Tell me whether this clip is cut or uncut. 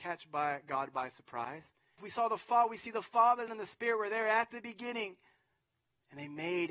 cut